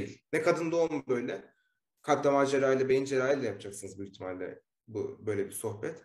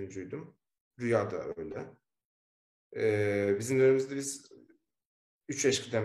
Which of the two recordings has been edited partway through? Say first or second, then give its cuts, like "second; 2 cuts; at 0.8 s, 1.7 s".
second; 1 cut; at 2.9 s